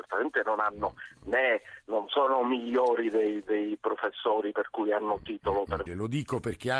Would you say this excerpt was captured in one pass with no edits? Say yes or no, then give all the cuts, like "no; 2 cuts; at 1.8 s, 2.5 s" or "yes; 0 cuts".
no; 1 cut; at 5.9 s